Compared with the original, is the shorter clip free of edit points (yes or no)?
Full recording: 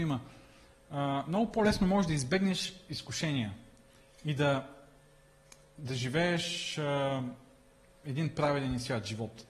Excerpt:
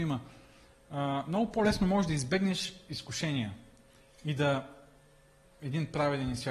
no